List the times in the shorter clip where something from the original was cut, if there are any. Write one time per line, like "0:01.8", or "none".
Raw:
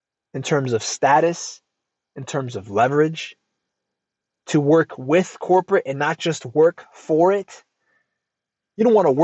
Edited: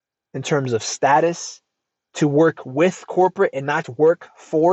0:02.1
0:03.8